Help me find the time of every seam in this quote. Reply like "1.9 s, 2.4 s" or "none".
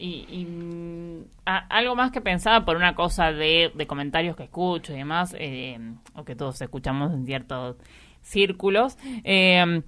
none